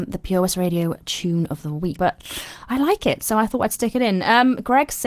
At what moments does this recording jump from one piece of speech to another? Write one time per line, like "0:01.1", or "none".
0:02.0